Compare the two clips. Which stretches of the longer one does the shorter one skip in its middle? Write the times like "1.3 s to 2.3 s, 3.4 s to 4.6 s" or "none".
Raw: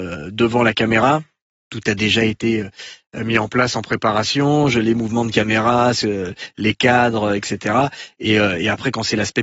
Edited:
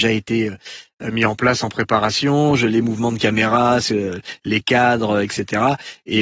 none